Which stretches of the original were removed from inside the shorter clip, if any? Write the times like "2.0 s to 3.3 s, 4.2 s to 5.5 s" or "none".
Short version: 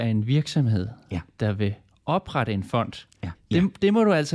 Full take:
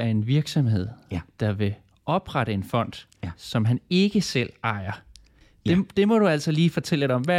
3.3 s to 5.5 s